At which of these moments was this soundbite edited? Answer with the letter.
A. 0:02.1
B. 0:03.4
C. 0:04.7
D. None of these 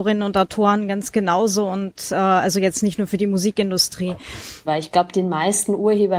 C